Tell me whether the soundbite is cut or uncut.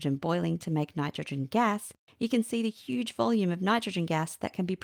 cut